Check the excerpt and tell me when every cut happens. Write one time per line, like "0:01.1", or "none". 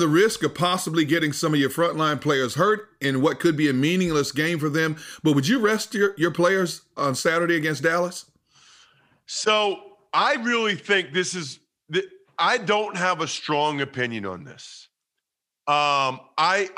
0:07.0